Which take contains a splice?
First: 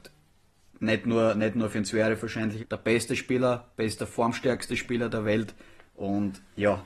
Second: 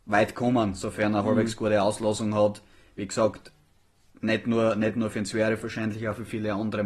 first; 1 cut; at 2.6 s

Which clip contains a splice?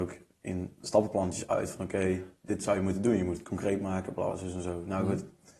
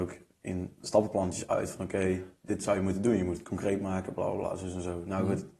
first; 1 cut; at 4.3 s

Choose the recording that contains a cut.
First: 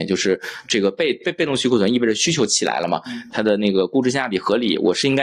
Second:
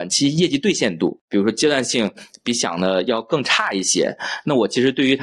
first; 1 cut; at 3.3 s

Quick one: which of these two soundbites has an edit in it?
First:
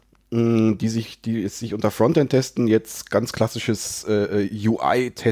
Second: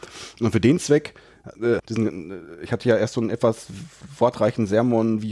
second; 1 cut; at 1.8 s

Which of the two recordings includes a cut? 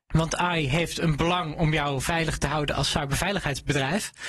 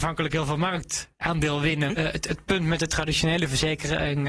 second; 1 cut; at 1.9 s

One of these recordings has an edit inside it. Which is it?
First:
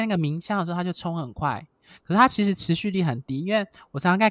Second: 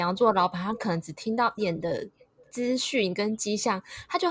second; 1 cut; at 1.6 s

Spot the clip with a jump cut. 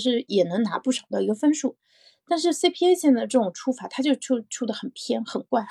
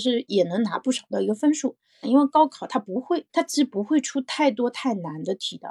second; 2 cuts; at 2.0 s, 3.3 s

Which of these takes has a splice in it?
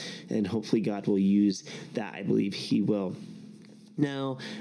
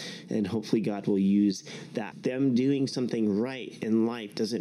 second; 1 cut; at 2.1 s

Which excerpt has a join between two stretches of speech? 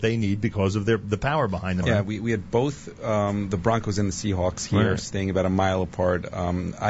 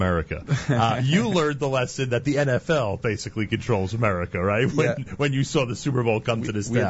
first; 1 cut; at 1.8 s

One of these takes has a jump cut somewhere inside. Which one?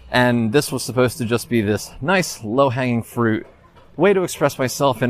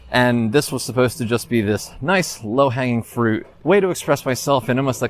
second; 1 cut; at 3.5 s

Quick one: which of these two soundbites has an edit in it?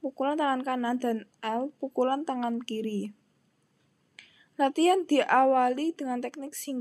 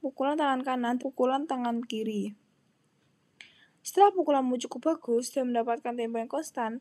second; 2 cuts; at 1.0 s, 3.7 s

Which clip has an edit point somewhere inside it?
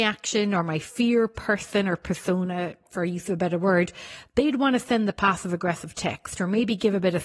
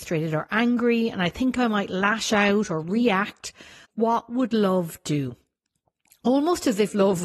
second; 1 cut; at 3.8 s

